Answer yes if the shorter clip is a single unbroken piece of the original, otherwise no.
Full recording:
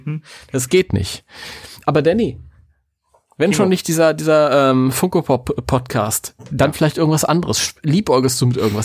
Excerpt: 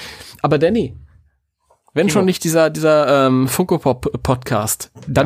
yes